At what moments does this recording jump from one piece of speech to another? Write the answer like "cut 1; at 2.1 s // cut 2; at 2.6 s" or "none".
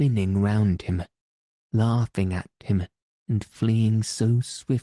none